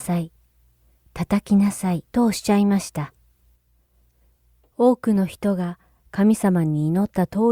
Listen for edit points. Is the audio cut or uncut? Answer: cut